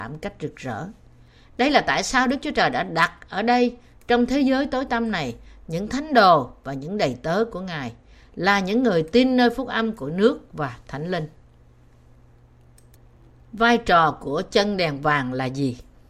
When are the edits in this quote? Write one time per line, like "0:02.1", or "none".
0:01.4

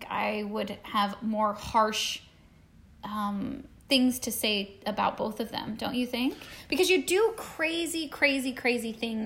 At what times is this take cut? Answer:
none

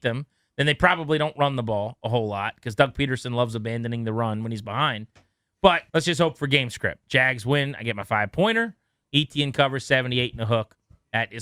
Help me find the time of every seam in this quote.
0:05.9

